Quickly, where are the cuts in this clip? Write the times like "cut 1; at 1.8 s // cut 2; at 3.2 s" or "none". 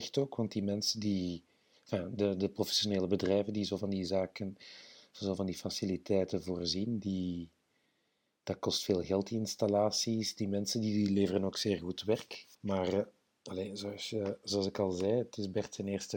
cut 1; at 12.5 s